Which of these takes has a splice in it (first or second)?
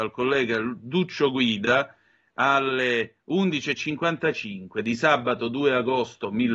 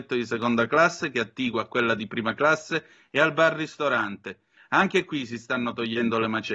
second